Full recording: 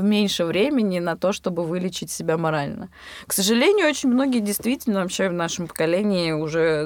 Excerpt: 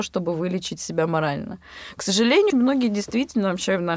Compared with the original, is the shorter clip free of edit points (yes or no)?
no